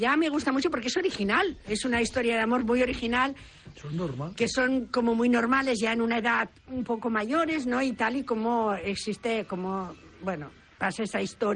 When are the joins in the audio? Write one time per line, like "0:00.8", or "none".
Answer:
0:03.7